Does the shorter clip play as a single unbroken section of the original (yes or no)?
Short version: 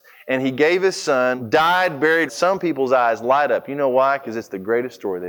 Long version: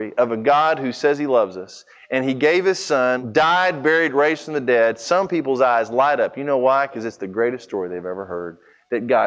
no